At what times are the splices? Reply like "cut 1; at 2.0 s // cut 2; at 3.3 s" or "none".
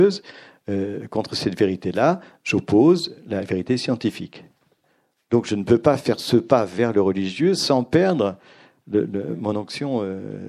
none